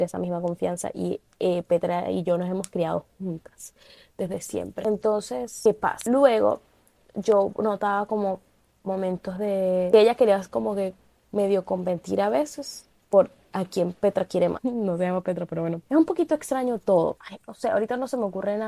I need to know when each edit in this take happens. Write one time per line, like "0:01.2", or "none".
0:14.6
0:15.9
0:17.2